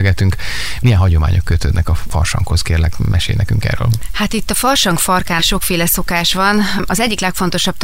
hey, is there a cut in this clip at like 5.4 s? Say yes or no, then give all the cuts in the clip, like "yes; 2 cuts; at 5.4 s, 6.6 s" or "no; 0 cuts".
yes; 1 cut; at 5.4 s